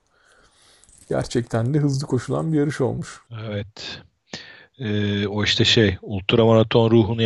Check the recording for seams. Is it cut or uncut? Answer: uncut